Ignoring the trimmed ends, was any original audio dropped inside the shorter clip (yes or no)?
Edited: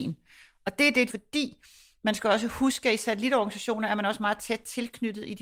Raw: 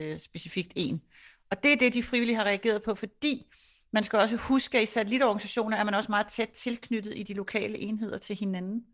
yes